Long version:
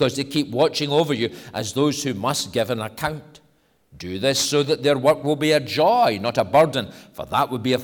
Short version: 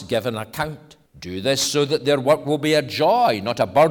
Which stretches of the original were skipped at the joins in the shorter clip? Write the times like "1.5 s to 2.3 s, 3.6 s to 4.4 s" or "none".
3.5 s to 3.8 s